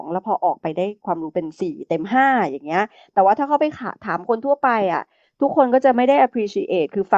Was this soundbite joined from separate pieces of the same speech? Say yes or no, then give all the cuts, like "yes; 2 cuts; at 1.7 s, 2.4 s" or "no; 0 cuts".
no; 0 cuts